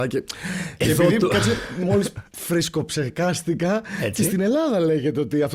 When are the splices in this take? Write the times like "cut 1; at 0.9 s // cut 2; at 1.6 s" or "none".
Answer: none

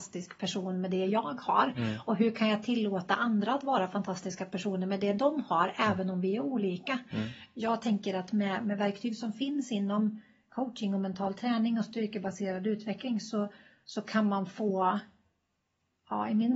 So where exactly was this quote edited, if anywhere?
none

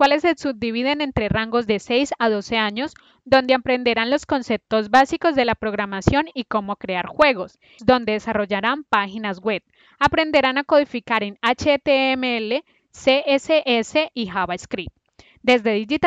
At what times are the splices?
cut 1; at 7.8 s

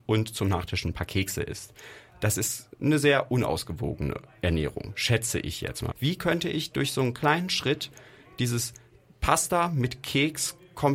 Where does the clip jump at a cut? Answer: cut 1; at 5.9 s

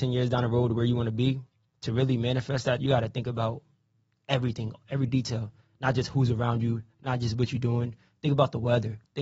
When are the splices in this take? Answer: cut 1; at 2.8 s

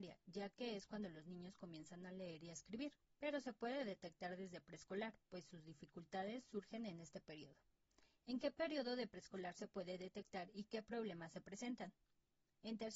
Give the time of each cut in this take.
none

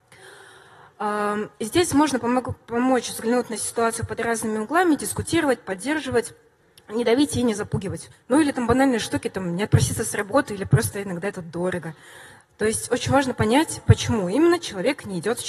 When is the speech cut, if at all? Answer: cut 1; at 8.1 s

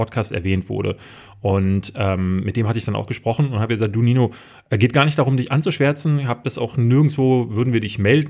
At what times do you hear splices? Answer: none

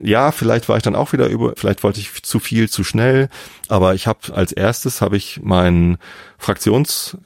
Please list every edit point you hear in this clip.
cut 1; at 1.6 s // cut 2; at 3.7 s

